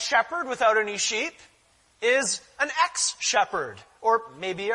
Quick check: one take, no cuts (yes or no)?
yes